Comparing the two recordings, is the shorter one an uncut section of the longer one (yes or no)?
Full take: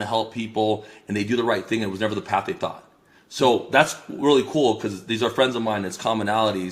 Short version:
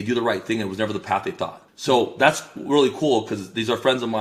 no